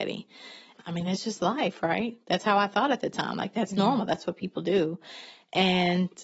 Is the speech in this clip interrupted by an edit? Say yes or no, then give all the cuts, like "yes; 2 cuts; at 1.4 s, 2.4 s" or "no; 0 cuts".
no; 0 cuts